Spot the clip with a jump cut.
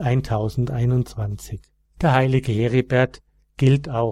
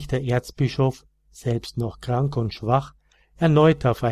first; 1 cut; at 1.8 s

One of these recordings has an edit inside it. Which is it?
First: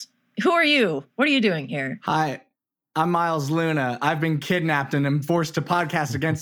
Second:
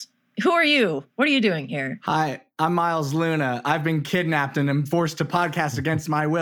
second; 1 cut; at 2.5 s

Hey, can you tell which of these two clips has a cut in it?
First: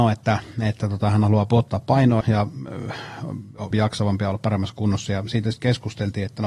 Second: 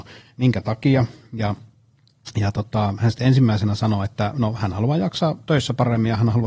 first; 2 cuts; at 2.2 s, 3.7 s

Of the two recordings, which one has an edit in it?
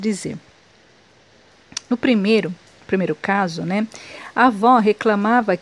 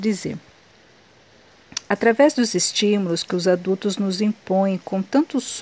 second; 1 cut; at 1.9 s

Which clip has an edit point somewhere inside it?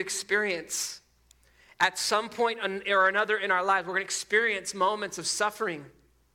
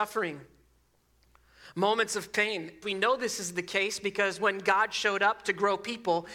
second; 1 cut; at 2.8 s

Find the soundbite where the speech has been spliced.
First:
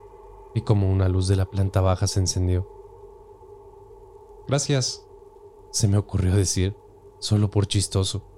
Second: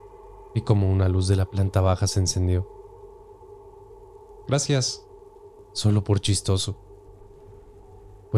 second; 1 cut; at 5.6 s

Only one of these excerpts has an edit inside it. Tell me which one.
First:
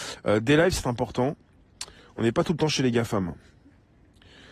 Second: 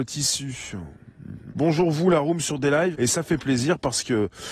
second; 2 cuts; at 1.5 s, 2.9 s

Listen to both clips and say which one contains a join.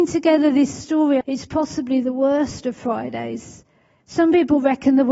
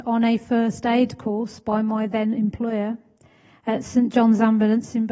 first; 2 cuts; at 1.2 s, 4.0 s

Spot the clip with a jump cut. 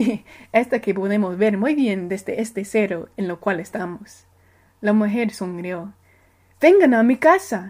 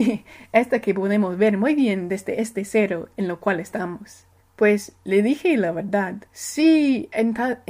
second; 2 cuts; at 4.4 s, 6.3 s

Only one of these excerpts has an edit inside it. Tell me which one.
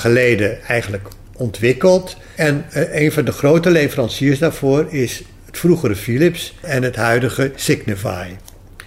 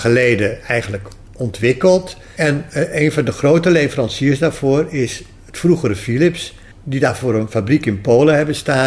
first; 1 cut; at 6.6 s

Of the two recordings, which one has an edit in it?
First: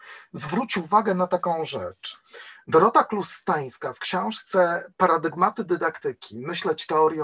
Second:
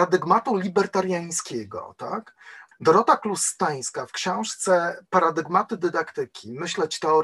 second; 1 cut; at 2.7 s

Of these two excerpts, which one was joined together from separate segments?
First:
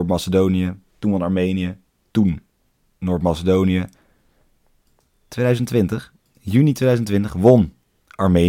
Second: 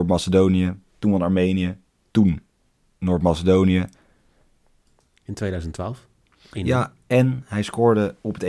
second; 1 cut; at 5.2 s

